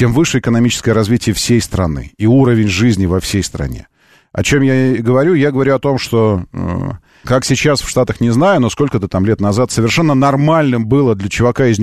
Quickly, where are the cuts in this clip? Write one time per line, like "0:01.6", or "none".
0:07.2